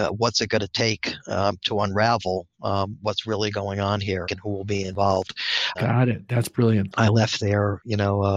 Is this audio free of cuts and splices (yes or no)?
no